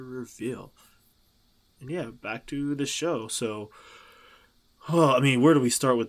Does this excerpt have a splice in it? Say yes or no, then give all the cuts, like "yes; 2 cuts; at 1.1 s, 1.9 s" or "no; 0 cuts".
no; 0 cuts